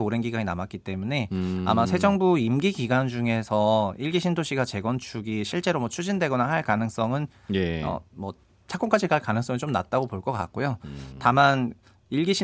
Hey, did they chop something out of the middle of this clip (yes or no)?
no